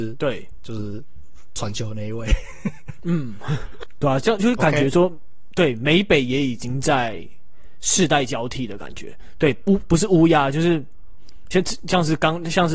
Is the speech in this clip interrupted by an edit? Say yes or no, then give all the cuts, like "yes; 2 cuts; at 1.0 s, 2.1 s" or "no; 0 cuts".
no; 0 cuts